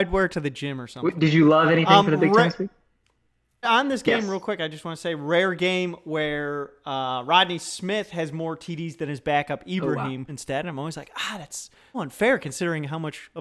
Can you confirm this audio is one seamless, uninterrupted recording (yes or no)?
no